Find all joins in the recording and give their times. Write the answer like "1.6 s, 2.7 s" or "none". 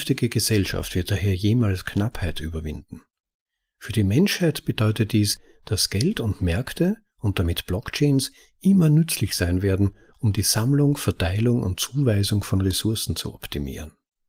none